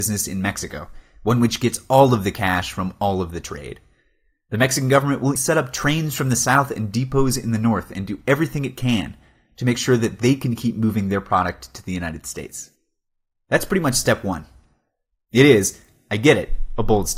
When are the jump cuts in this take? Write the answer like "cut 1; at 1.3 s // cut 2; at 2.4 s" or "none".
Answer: cut 1; at 5.4 s